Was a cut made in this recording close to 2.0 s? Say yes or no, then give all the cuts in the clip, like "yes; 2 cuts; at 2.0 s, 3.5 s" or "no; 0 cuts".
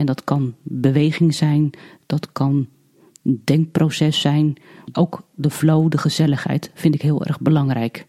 no; 1 cut; at 4.9 s